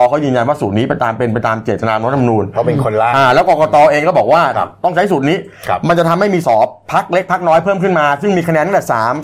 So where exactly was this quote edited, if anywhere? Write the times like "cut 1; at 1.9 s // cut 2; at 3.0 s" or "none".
cut 1; at 6.4 s